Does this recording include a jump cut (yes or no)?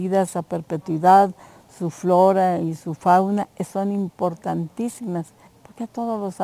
yes